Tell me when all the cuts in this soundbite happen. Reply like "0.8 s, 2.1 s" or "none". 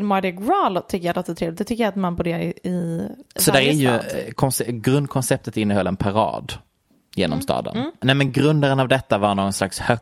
none